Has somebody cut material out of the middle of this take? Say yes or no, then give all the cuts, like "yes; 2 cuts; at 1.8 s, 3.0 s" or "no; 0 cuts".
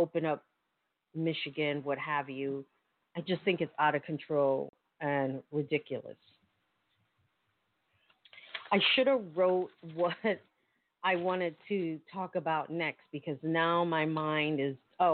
no; 0 cuts